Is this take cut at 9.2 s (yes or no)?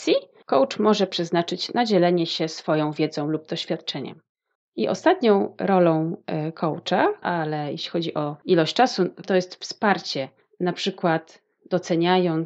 yes